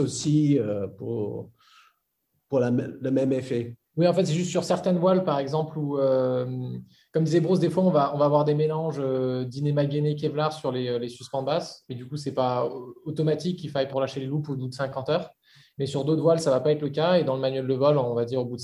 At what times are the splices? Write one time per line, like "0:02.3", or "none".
0:03.9
0:13.9